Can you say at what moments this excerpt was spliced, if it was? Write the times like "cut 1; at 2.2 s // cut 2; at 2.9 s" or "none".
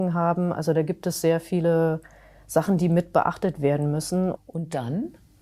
cut 1; at 4.3 s